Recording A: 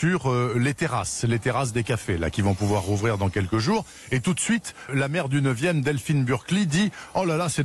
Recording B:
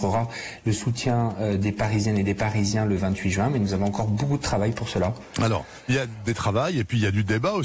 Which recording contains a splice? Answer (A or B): A